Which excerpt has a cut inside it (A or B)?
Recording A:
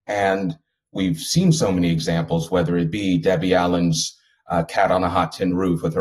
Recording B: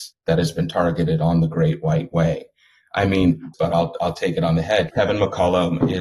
B